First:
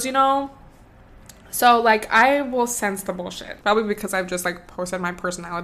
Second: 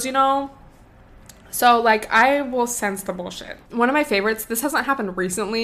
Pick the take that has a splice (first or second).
first